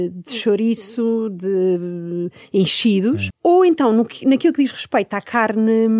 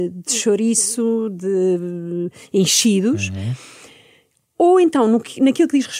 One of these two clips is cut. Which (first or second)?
first